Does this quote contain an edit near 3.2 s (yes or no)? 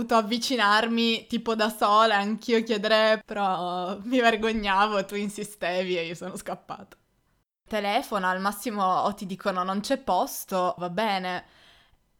yes